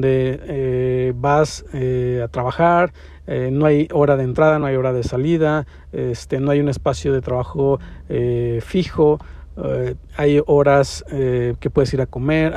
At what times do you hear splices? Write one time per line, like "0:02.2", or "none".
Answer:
none